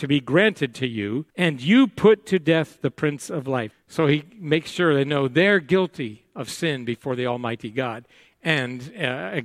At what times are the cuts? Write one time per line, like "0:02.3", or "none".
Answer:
0:01.3
0:03.7

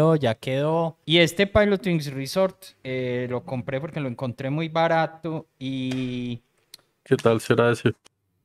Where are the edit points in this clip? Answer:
0:01.0

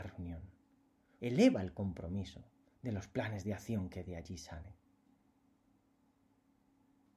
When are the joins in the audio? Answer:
0:01.2

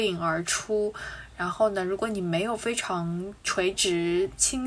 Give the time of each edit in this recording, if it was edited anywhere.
0:03.4

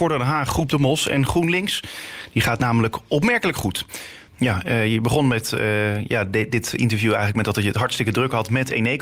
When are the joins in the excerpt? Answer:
0:04.3

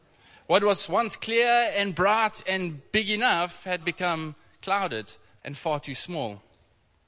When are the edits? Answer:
0:03.8
0:05.4

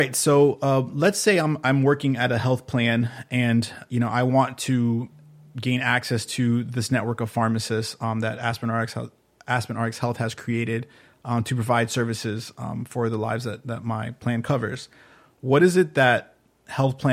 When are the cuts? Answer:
none

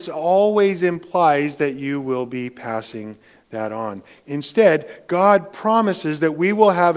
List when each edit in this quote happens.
none

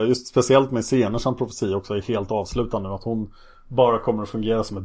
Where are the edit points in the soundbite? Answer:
none

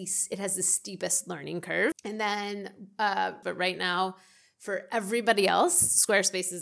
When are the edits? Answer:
0:01.9
0:03.4

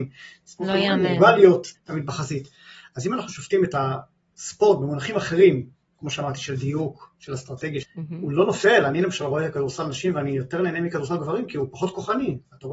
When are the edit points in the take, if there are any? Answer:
0:01.8
0:07.8

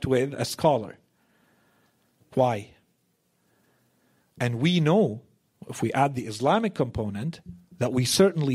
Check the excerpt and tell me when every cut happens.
0:04.2

